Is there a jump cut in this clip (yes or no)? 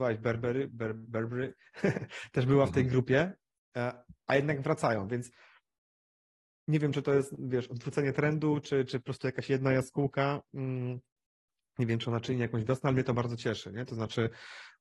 no